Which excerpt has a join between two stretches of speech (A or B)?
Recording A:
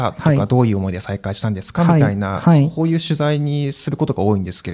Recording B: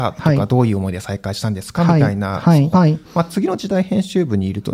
B